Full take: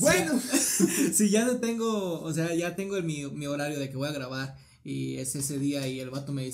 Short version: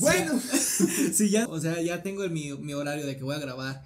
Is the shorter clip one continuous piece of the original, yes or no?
no